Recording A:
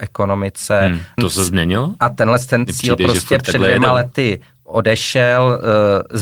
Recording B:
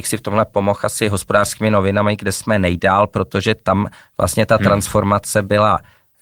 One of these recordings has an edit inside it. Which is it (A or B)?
A